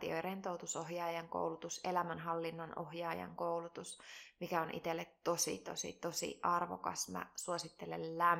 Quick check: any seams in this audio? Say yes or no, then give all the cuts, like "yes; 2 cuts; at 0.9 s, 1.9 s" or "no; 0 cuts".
no; 0 cuts